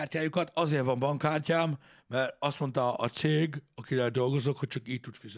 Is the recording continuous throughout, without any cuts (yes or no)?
yes